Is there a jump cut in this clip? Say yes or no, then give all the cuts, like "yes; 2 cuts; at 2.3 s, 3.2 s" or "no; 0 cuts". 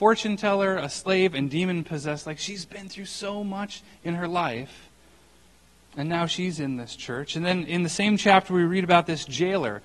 no; 0 cuts